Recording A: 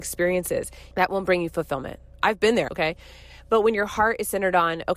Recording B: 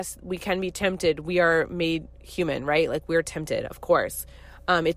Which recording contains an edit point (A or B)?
A